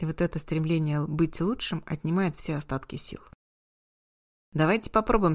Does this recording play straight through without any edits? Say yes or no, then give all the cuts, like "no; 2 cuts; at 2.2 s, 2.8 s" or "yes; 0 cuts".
no; 1 cut; at 4.3 s